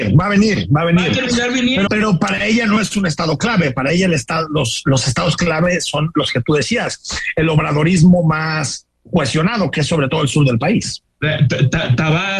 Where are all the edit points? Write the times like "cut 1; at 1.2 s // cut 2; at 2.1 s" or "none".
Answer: cut 1; at 1.9 s